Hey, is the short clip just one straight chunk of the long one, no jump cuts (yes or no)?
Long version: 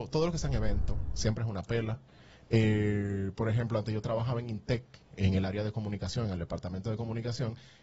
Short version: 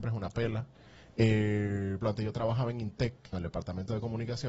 no